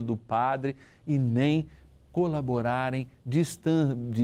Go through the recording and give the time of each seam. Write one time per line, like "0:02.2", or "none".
none